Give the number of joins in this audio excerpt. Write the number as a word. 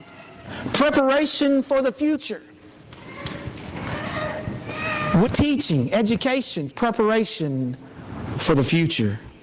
two